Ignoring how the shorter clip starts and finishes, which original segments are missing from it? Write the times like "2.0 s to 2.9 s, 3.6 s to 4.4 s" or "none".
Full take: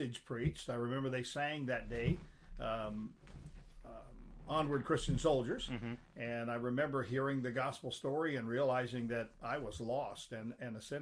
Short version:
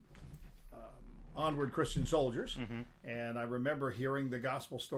none